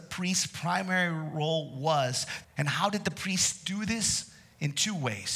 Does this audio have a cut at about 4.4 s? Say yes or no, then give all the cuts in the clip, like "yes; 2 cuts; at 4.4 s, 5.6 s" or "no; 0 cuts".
no; 1 cut; at 2.4 s